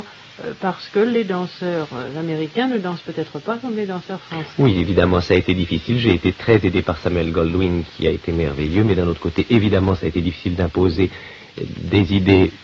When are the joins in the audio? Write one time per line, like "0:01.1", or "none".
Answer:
none

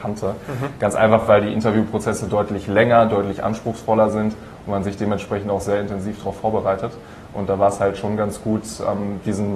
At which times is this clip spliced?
none

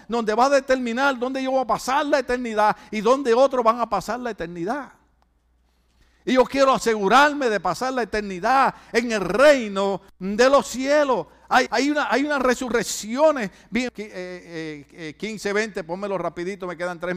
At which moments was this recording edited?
0:11.7
0:13.9

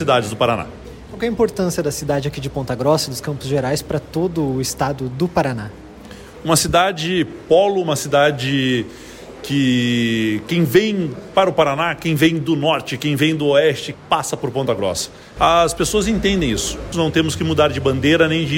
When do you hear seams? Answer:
0:13.9
0:15.4
0:16.9

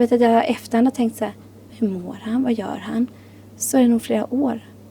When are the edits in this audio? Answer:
0:01.7

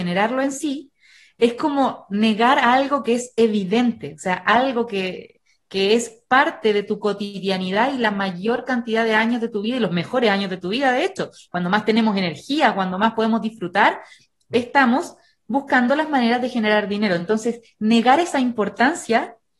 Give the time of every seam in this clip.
none

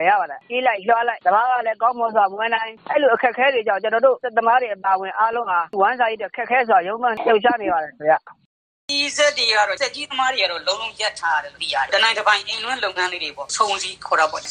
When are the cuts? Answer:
none

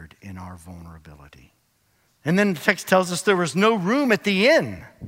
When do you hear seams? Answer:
0:02.1

